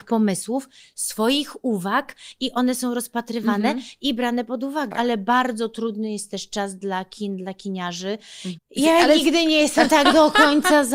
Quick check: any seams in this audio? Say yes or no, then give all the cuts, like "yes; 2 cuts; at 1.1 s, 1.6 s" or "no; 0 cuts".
yes; 2 cuts; at 4.9 s, 8.6 s